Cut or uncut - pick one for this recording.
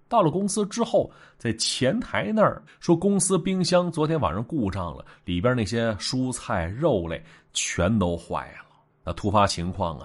cut